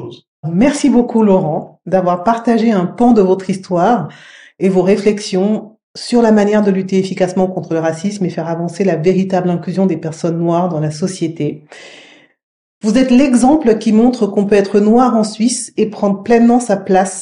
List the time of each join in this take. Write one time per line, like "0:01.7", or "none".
none